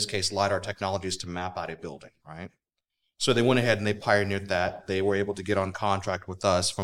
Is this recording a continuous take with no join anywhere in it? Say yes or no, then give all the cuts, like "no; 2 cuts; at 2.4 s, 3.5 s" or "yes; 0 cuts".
yes; 0 cuts